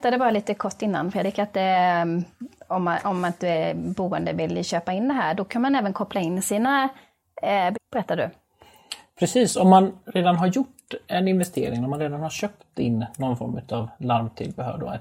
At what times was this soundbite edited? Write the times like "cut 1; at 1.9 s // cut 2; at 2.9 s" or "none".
cut 1; at 7.7 s

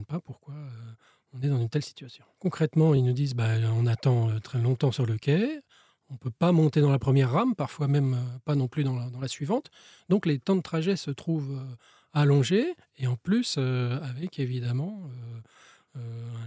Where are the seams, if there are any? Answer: none

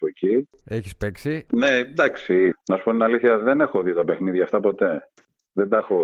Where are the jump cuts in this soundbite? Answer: cut 1; at 1.5 s // cut 2; at 2.5 s

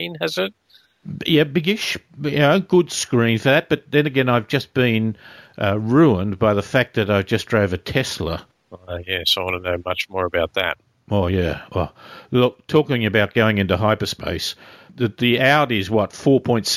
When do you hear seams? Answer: cut 1; at 14.9 s

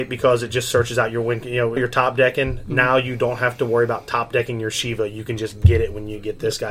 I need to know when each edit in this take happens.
cut 1; at 1.8 s

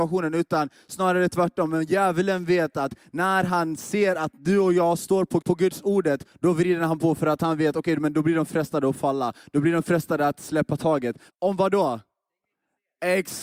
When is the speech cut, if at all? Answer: cut 1; at 5.4 s // cut 2; at 11.3 s

